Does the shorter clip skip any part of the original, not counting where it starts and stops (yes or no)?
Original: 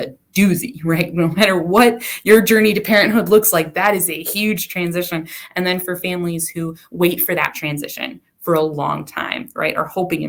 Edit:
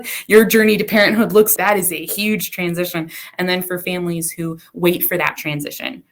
yes